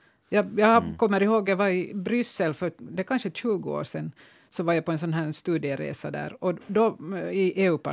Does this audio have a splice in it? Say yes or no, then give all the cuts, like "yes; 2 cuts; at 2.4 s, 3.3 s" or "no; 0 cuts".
no; 0 cuts